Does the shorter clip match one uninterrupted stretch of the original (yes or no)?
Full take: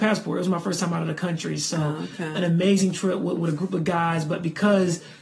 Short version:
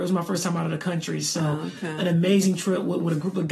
yes